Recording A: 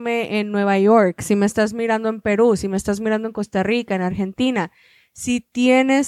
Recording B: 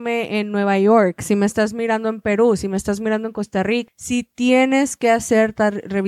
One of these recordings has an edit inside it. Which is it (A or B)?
B